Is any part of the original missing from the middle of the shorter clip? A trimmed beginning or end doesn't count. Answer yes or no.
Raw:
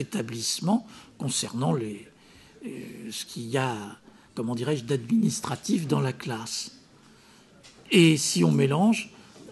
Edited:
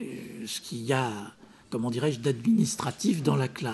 no